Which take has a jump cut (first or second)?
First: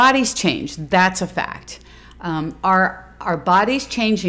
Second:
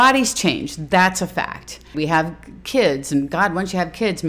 second